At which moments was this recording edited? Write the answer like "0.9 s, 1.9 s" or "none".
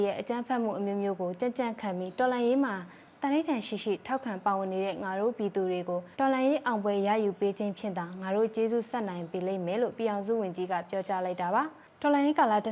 6.1 s